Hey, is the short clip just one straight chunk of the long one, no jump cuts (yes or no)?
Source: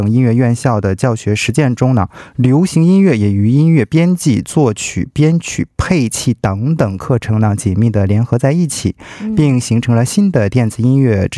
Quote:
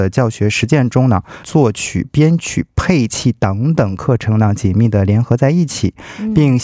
no